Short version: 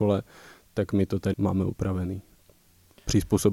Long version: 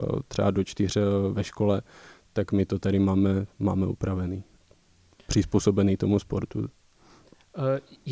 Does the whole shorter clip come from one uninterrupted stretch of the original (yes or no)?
no